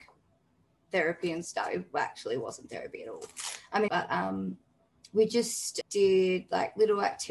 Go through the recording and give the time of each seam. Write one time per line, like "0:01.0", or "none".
0:03.9
0:05.8